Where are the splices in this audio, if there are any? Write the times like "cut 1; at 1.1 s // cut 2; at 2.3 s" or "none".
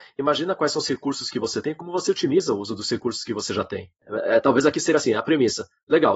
none

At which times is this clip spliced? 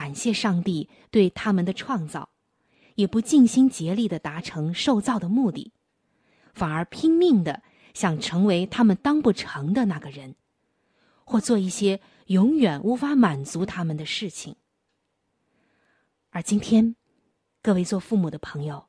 none

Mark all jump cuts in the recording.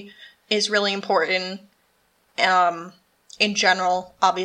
none

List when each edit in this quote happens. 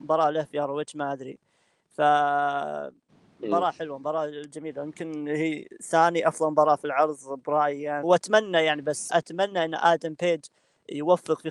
cut 1; at 8.0 s // cut 2; at 9.1 s

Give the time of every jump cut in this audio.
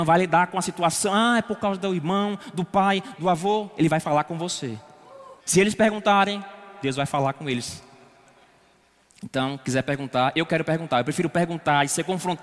cut 1; at 3.1 s // cut 2; at 5.4 s

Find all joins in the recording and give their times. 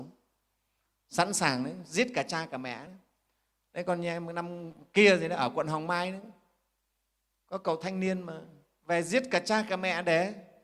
none

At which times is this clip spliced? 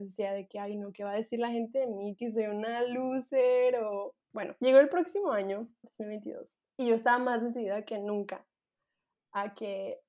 cut 1; at 4.2 s // cut 2; at 5.8 s

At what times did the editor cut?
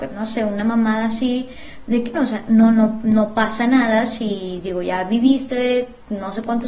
cut 1; at 2.1 s

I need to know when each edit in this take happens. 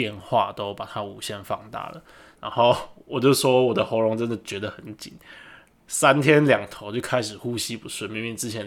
cut 1; at 2.3 s

